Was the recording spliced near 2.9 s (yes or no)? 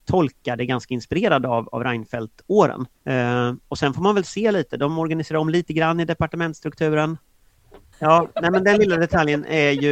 yes